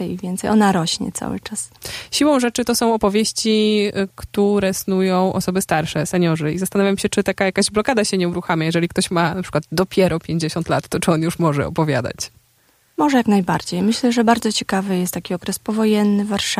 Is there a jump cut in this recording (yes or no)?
no